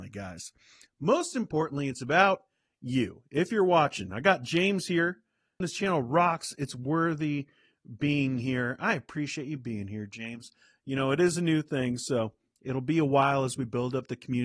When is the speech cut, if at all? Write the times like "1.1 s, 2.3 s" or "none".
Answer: 5.6 s